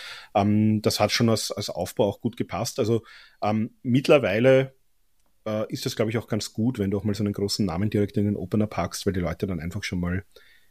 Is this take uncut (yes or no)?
yes